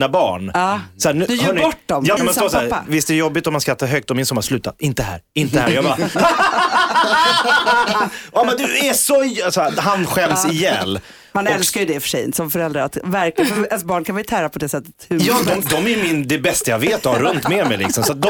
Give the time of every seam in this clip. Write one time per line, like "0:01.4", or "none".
0:02.2